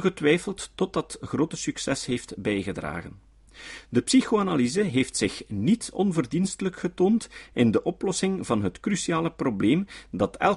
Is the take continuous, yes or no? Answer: yes